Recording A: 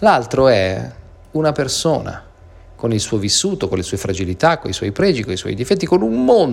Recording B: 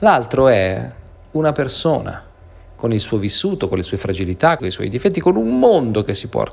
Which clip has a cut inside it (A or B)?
B